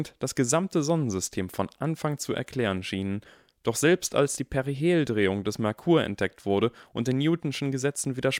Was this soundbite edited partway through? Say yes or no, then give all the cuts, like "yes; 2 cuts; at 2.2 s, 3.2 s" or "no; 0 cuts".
no; 0 cuts